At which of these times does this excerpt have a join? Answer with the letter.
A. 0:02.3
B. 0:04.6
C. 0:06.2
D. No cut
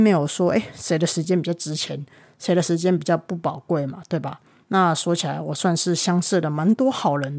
B